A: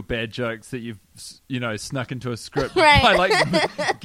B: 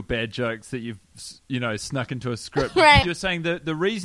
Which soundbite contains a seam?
B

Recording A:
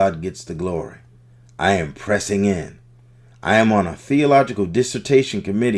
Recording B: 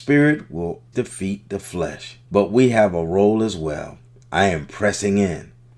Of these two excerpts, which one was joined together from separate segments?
B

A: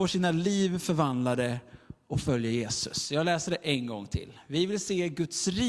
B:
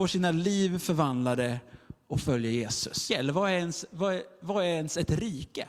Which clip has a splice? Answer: B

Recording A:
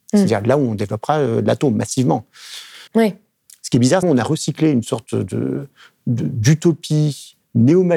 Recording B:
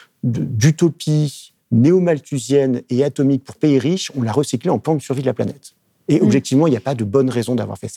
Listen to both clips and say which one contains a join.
A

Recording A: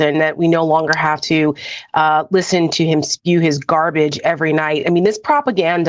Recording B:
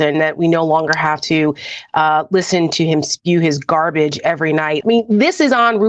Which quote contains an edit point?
B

